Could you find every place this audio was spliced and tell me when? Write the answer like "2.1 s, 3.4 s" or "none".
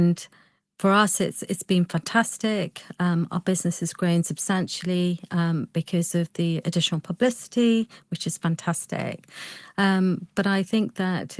none